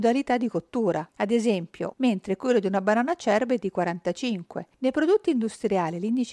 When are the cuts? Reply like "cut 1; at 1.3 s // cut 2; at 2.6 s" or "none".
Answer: cut 1; at 1.9 s

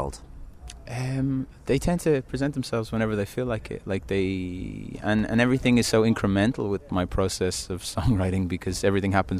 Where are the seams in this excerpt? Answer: cut 1; at 6.8 s

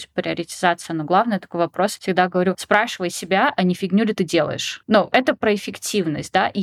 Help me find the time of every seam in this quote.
none

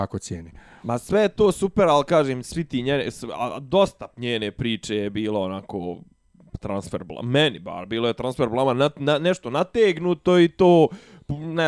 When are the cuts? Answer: none

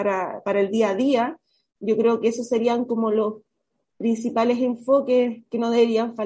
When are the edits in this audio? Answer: cut 1; at 1.7 s

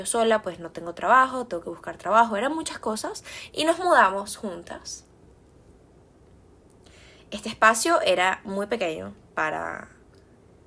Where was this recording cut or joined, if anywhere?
cut 1; at 3.5 s

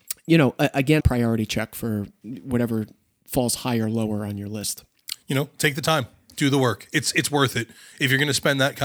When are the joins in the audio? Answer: cut 1; at 1.0 s // cut 2; at 5.1 s

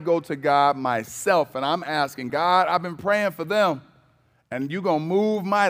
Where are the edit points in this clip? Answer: cut 1; at 2.3 s

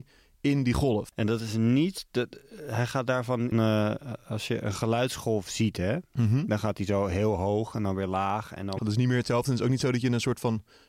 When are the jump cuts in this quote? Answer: cut 1; at 3.5 s // cut 2; at 8.8 s

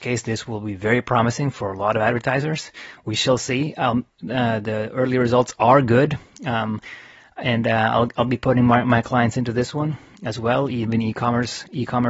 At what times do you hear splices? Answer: none

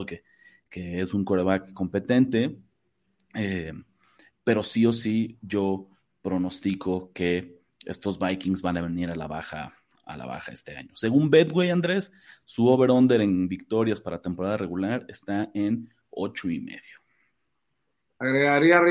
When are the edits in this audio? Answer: none

